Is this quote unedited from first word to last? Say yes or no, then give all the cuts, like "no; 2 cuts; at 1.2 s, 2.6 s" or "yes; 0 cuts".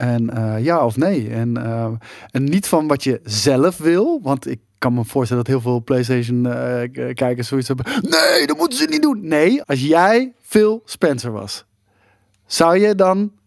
no; 1 cut; at 9.6 s